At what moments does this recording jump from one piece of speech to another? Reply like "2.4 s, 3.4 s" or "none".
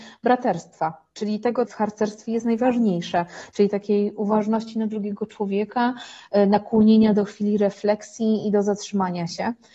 1.7 s